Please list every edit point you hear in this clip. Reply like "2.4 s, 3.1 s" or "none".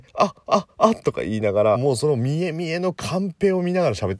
1.7 s